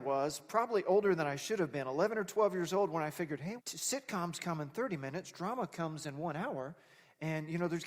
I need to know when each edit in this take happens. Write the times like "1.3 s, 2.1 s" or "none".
3.6 s